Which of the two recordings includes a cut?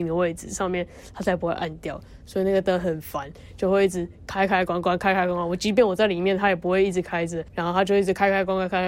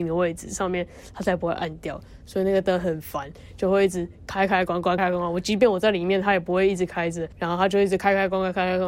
second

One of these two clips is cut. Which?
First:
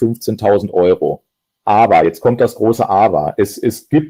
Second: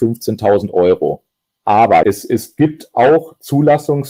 second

